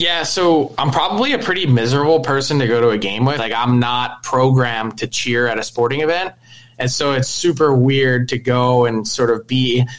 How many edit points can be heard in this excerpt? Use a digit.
1